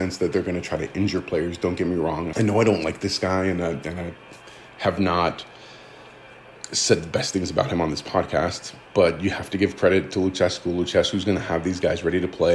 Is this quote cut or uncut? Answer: cut